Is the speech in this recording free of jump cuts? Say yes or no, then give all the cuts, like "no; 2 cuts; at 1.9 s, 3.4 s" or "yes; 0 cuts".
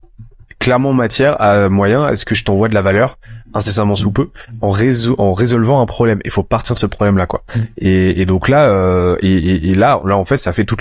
yes; 0 cuts